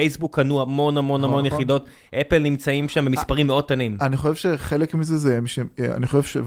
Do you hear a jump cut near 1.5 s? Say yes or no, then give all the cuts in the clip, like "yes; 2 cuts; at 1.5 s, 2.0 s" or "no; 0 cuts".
no; 0 cuts